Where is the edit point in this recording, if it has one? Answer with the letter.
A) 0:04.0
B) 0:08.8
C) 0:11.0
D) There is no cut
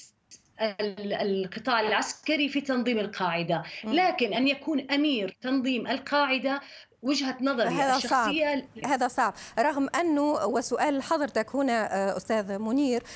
B